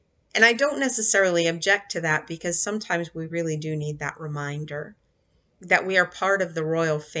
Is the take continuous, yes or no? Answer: yes